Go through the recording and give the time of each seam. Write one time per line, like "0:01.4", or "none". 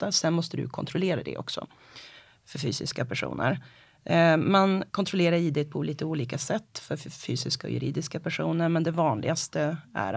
0:04.9

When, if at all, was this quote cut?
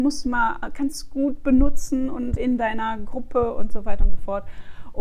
0:02.4

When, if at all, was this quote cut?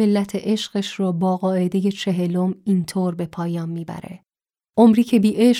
none

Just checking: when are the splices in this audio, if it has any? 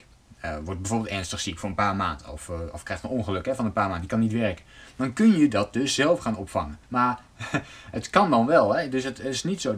0:06.8

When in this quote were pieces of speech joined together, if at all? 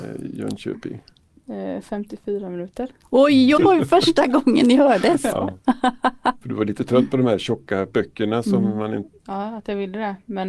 0:03.6
0:06.4
0:09.1

